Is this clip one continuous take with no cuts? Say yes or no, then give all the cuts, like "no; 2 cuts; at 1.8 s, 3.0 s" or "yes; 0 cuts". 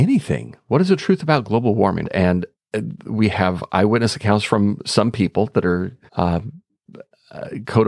no; 2 cuts; at 2.0 s, 6.1 s